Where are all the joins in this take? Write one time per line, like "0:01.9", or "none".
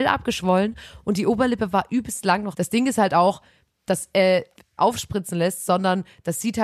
0:02.5
0:04.8